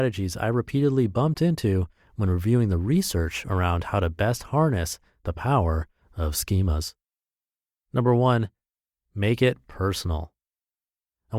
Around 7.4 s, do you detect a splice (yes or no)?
no